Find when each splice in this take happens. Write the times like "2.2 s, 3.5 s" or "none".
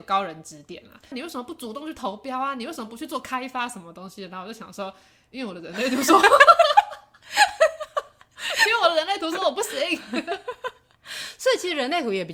1.1 s

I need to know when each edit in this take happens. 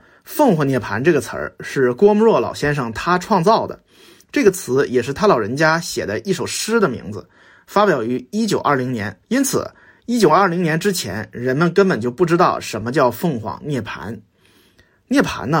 9.2 s

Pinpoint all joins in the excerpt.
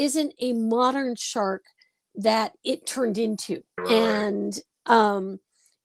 3.8 s

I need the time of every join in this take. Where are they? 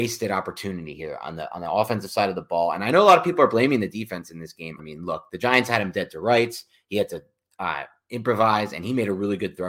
4.8 s

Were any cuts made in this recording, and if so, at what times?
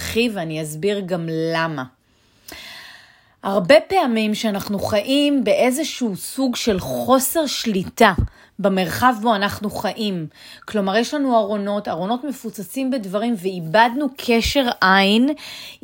none

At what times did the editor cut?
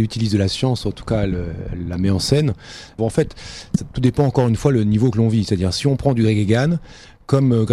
3.0 s

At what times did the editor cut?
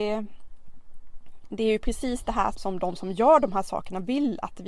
2.5 s

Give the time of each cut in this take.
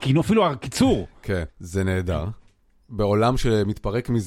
1.5 s

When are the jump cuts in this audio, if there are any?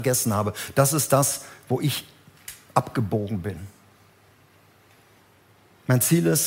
none

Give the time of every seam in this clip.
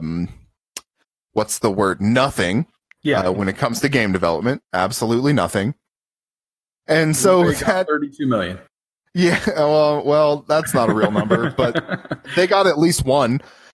none

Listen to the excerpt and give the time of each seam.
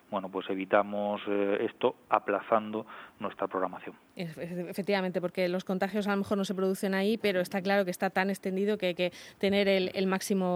none

